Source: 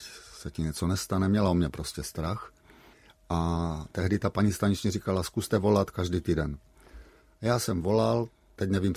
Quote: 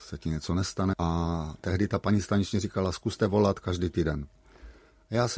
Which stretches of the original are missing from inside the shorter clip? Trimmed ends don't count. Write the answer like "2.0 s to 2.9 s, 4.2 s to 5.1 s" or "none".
1.3 s to 3.2 s